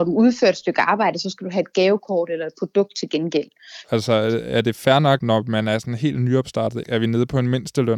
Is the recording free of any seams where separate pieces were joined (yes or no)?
no